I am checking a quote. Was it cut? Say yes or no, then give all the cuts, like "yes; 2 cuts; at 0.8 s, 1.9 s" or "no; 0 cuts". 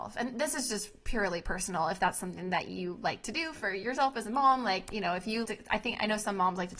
yes; 1 cut; at 5.4 s